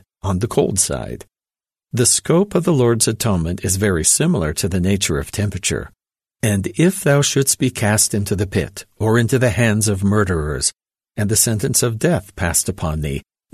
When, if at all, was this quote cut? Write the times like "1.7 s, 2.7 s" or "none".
1.8 s, 6.2 s